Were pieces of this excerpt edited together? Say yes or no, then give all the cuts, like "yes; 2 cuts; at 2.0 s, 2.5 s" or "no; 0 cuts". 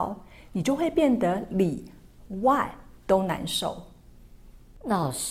no; 0 cuts